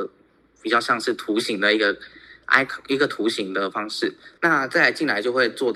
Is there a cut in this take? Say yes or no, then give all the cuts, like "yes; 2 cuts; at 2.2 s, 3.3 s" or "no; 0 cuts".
yes; 1 cut; at 4.4 s